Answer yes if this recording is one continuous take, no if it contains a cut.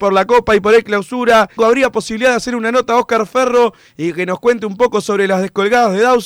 no